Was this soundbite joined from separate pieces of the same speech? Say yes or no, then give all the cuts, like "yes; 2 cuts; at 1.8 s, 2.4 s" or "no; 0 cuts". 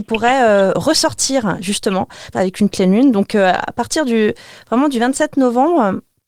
yes; 1 cut; at 2.3 s